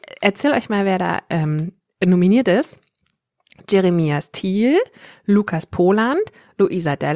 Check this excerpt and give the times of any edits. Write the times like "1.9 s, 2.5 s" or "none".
none